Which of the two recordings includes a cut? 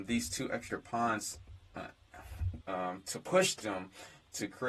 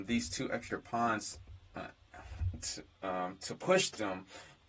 first; 1 cut; at 2.6 s

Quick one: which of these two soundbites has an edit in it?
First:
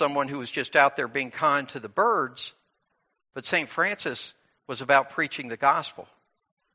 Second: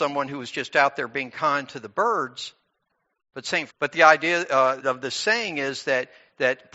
second; 2 cuts; at 3.7 s, 4.8 s

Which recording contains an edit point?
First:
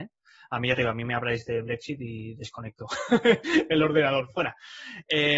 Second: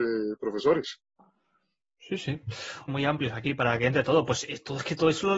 second; 1 cut; at 2.9 s

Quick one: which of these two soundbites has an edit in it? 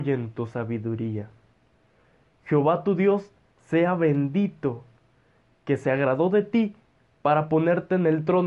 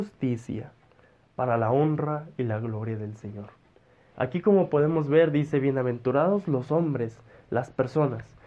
second; 1 cut; at 4.1 s

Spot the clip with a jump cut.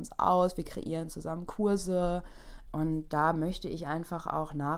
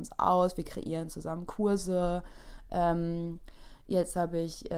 first; 1 cut; at 2.7 s

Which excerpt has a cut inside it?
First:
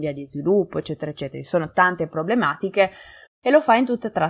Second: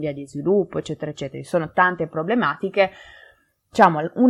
first; 1 cut; at 3.3 s

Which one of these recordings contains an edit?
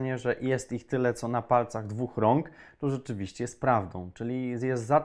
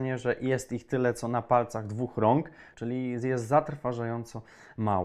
second; 1 cut; at 2.7 s

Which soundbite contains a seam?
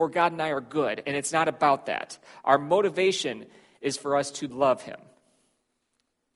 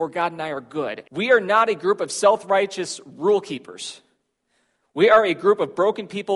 second; 1 cut; at 1.0 s

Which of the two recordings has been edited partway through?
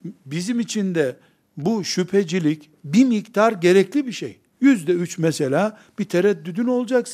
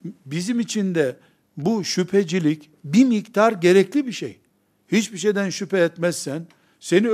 first; 1 cut; at 4.5 s

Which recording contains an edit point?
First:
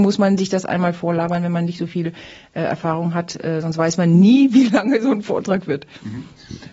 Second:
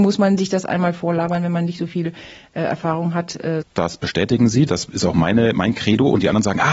second; 1 cut; at 3.6 s

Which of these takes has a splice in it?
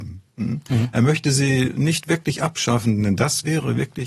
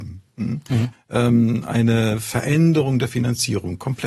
second; 1 cut; at 0.9 s

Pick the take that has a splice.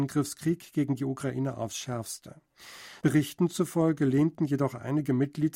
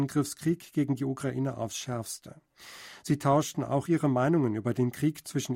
first; 1 cut; at 3.0 s

